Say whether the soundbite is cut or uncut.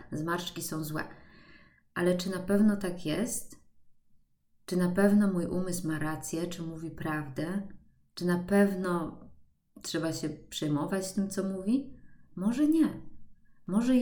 uncut